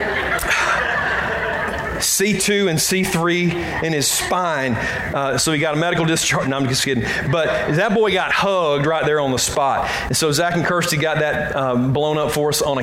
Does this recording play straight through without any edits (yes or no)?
yes